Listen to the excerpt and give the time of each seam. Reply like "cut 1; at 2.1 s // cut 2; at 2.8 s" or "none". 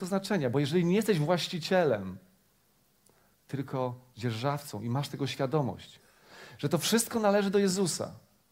none